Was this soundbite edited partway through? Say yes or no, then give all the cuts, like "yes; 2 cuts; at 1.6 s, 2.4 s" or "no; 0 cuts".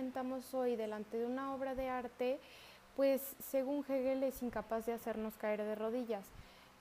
no; 0 cuts